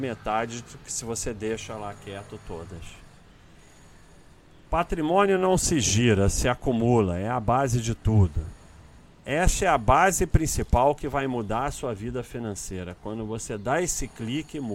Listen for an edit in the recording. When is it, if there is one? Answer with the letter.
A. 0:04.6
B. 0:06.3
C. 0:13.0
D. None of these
D